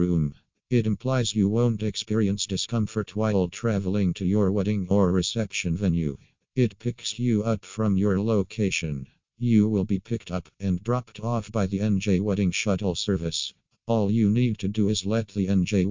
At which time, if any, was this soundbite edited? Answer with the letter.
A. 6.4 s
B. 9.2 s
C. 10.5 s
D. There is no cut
C